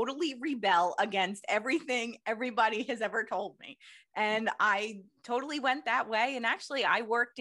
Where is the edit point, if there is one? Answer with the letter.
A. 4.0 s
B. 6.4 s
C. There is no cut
C